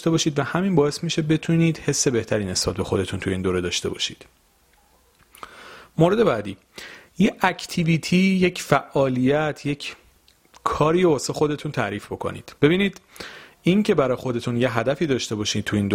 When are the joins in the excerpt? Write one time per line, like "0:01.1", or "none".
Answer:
0:12.6

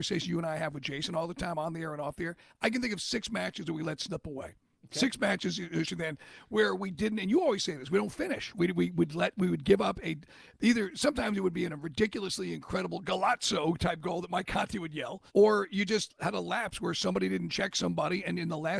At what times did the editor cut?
0:05.8
0:15.3

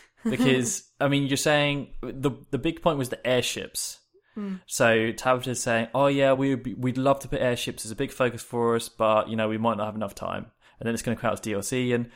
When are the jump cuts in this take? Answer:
none

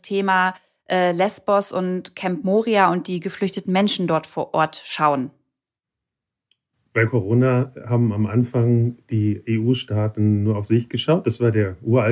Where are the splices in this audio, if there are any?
none

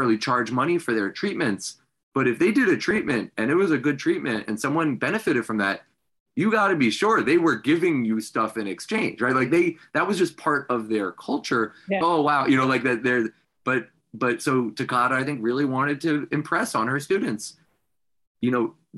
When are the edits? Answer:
0:12.0

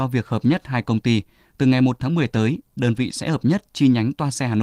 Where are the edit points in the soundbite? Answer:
none

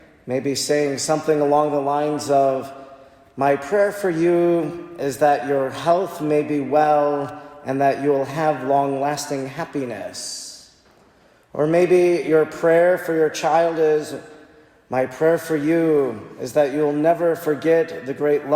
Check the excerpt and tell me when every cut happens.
none

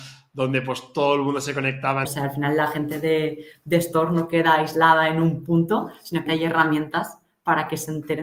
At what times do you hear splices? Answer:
0:02.0
0:06.3

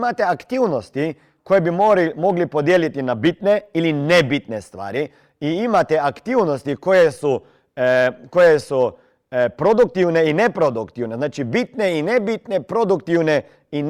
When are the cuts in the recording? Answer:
none

